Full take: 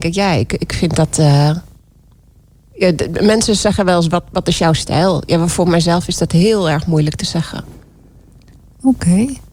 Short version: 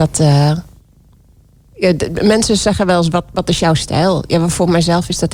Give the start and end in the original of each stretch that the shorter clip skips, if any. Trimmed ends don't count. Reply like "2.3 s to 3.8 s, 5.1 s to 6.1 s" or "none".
none